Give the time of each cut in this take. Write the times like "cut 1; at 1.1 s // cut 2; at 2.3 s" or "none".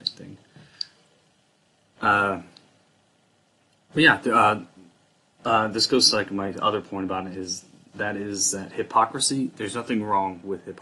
none

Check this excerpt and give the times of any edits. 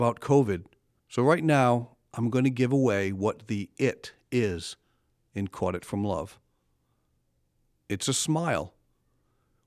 cut 1; at 1.0 s

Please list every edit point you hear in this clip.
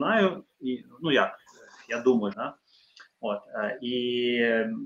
cut 1; at 2.3 s

